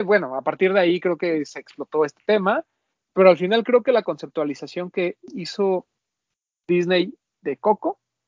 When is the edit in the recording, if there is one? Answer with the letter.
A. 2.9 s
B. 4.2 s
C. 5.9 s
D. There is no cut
A